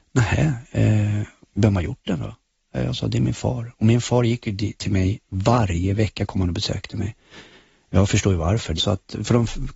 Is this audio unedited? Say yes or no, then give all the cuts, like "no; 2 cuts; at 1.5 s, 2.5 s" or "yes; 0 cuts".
no; 1 cut; at 8.8 s